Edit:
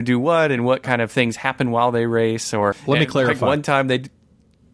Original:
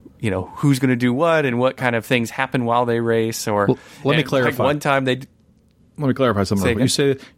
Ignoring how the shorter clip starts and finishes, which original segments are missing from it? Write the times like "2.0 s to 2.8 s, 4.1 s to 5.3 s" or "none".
3.7 s to 3.9 s